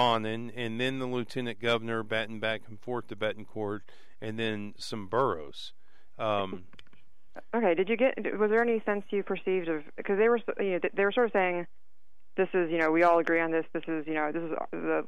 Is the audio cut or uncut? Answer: uncut